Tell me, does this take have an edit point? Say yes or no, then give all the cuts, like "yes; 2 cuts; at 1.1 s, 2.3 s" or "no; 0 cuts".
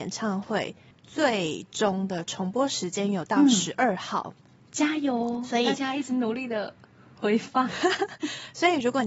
no; 0 cuts